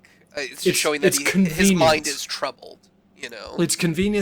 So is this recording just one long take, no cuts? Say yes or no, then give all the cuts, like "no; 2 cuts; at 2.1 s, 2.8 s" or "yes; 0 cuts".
yes; 0 cuts